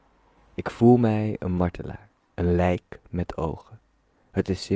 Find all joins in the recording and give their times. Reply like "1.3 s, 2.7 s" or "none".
2.3 s